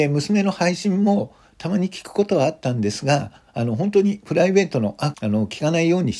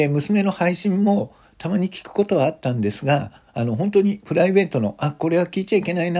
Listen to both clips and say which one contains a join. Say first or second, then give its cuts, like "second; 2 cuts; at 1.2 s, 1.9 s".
first; 1 cut; at 5.1 s